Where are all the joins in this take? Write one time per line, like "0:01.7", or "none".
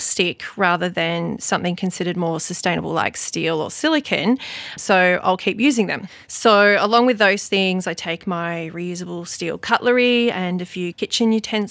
0:04.8